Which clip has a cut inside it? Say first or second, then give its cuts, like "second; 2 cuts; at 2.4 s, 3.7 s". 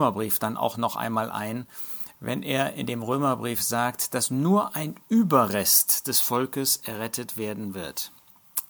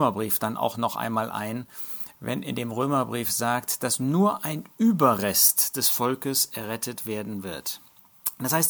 second; 1 cut; at 2.4 s